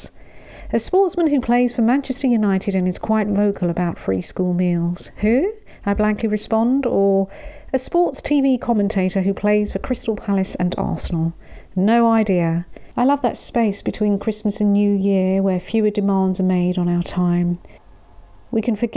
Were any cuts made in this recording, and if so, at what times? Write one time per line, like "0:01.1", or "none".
0:12.9